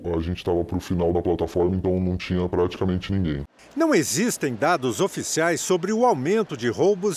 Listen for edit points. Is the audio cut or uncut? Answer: uncut